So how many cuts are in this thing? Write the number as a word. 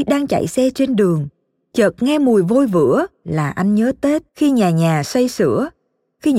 one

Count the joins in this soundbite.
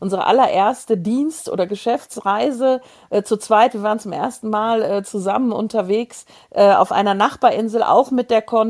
zero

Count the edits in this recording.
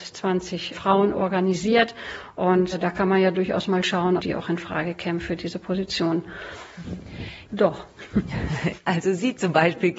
two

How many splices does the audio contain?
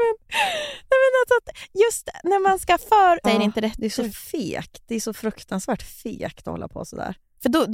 one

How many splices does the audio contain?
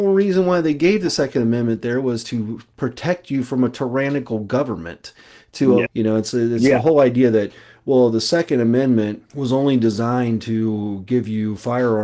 two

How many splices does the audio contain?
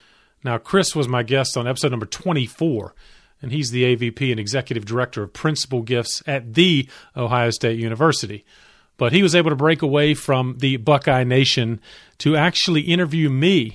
zero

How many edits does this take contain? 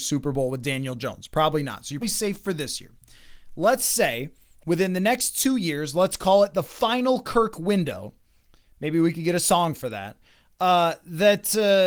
one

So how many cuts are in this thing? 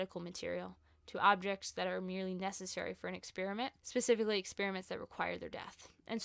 one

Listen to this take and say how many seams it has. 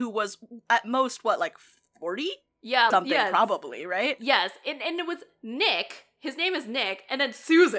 one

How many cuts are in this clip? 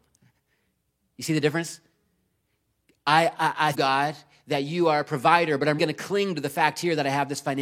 two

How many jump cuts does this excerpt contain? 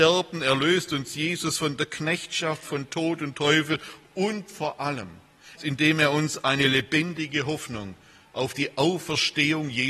one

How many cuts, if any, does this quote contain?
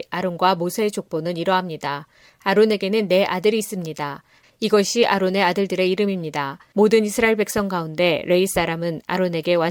two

